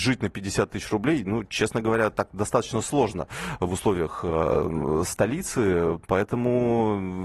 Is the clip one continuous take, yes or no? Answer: yes